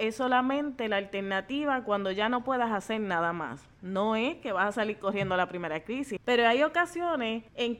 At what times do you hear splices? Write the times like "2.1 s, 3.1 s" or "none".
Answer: 3.8 s, 6.2 s